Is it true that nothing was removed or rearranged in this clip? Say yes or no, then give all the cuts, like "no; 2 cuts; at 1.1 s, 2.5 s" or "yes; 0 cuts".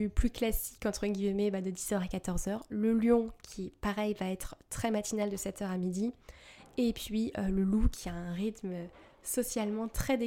yes; 0 cuts